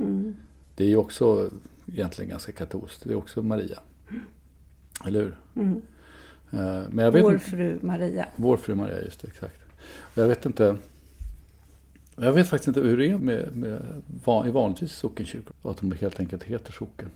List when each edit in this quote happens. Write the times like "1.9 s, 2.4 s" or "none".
13.2 s, 15.5 s